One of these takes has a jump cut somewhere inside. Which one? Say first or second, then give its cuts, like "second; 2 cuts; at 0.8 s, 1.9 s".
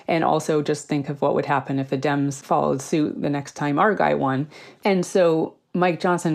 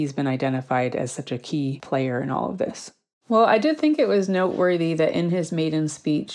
second; 1 cut; at 3.2 s